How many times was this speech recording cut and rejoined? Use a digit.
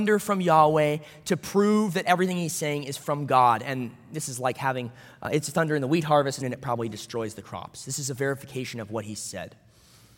1